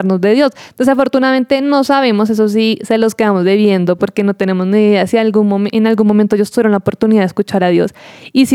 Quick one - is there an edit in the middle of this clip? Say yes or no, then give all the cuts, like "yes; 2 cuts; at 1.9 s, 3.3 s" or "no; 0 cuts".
no; 0 cuts